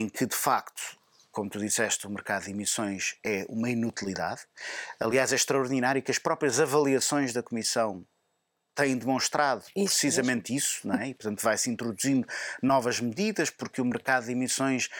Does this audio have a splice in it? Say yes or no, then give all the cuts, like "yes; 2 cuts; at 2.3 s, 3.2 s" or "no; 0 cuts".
no; 0 cuts